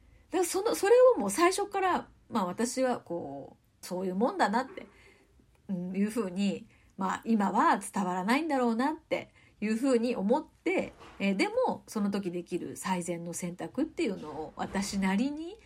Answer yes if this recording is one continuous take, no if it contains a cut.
no